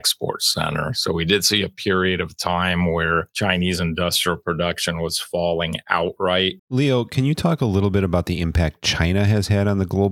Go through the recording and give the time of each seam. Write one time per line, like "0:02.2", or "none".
0:06.6